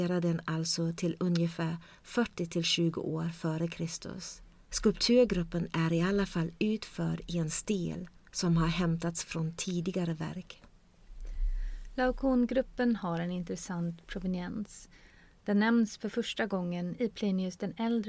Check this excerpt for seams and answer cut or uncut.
uncut